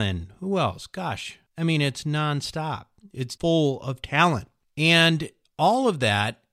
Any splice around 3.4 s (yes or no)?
yes